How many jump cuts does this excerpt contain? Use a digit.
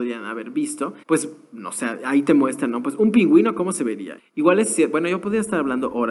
2